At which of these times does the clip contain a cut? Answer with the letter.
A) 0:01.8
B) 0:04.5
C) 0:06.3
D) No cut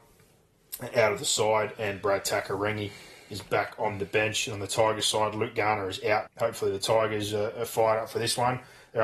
C